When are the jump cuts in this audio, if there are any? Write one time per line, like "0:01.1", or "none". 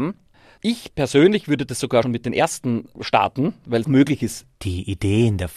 0:02.0
0:03.8